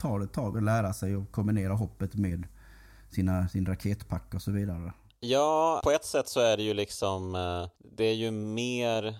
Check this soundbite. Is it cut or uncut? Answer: cut